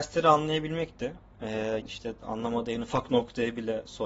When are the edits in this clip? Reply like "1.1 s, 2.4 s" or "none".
1.8 s